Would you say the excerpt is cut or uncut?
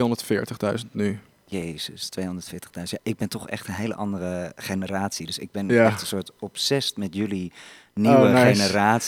cut